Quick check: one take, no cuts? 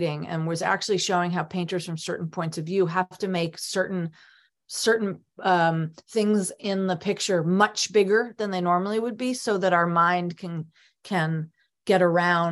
yes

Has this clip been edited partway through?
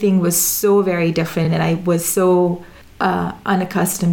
no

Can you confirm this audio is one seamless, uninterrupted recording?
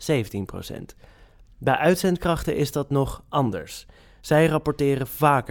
yes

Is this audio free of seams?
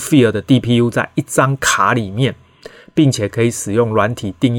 yes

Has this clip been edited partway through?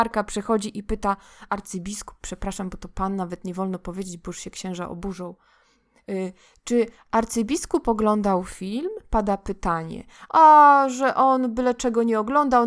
yes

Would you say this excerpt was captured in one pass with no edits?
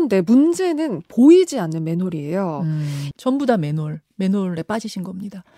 no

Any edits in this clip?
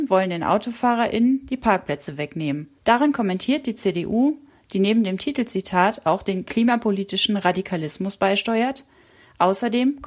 yes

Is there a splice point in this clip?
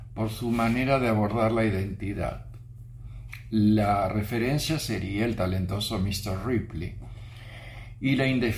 no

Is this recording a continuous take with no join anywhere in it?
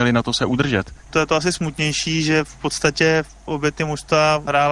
yes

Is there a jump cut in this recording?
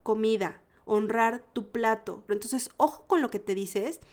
yes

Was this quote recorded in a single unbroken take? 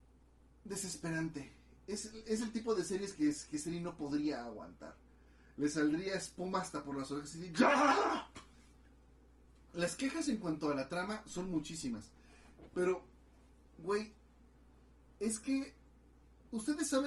no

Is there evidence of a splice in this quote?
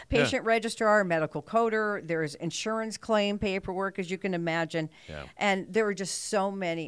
no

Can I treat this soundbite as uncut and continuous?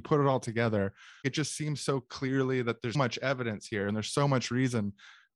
no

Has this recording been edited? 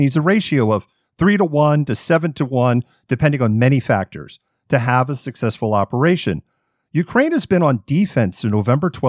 no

